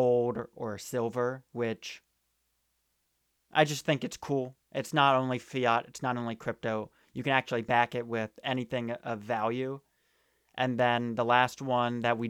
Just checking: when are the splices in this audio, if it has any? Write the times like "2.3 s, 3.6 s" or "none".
none